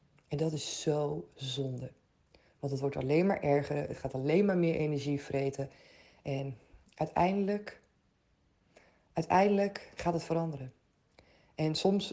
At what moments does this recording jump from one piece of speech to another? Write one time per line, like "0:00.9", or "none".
none